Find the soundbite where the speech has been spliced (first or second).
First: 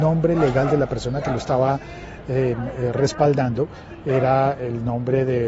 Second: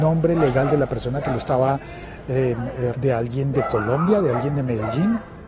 second